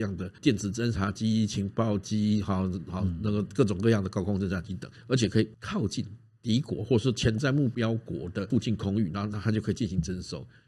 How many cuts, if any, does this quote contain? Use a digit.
1